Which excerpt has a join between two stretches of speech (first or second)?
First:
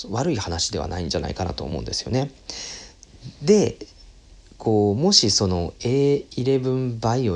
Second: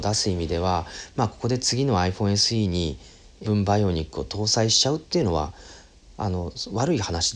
second